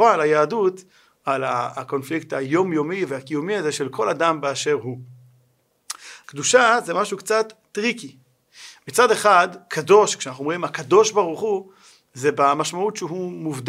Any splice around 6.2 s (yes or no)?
yes